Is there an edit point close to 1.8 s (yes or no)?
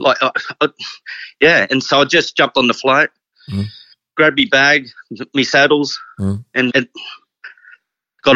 no